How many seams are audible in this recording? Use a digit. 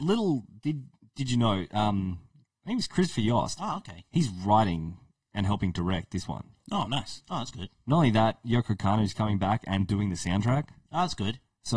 1